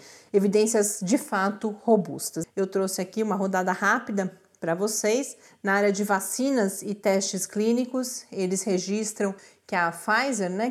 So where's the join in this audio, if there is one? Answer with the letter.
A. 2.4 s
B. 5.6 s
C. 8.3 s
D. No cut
A